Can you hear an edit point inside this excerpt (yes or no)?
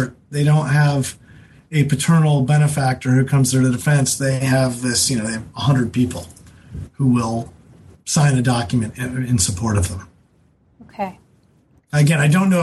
no